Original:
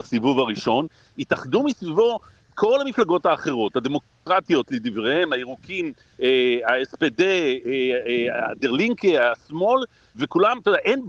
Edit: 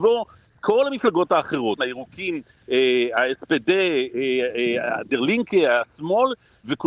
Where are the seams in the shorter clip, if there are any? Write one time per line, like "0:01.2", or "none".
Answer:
0:01.8